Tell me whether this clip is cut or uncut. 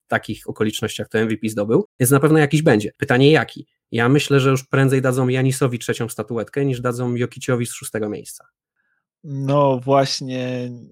uncut